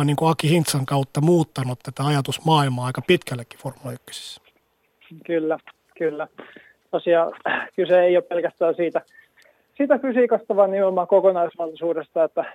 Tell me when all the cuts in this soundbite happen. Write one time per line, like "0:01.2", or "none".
none